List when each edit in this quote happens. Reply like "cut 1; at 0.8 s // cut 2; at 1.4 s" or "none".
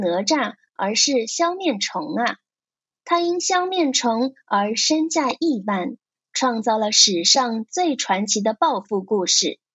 cut 1; at 3.0 s